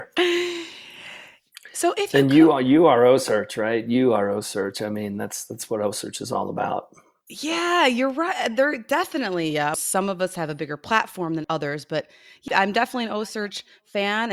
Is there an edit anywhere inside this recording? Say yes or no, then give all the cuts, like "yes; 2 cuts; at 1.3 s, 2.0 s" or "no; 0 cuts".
yes; 3 cuts; at 9.7 s, 11.4 s, 12.5 s